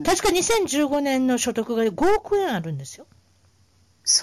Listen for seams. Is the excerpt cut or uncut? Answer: uncut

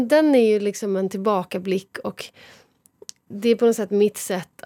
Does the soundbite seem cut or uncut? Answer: uncut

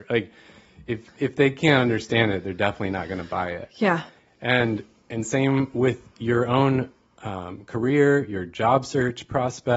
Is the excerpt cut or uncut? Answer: uncut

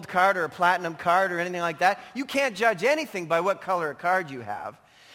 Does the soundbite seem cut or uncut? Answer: uncut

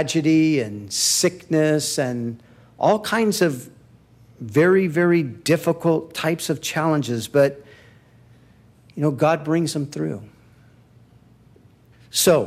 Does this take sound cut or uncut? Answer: uncut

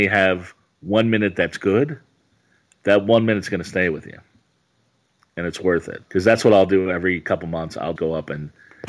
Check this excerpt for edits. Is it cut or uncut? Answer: cut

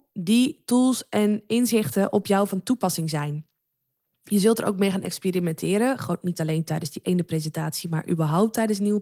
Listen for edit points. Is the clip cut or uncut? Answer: uncut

